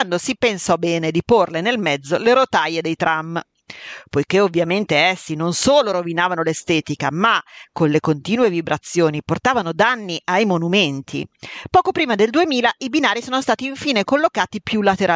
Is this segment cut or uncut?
uncut